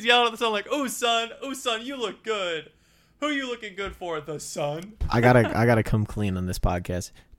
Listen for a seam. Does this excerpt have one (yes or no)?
no